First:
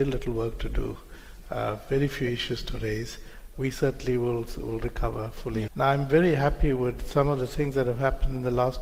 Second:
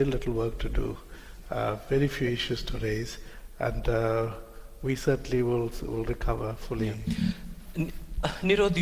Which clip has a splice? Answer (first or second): first